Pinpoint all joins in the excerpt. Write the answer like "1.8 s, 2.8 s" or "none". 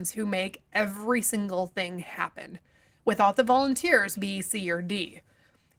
4.2 s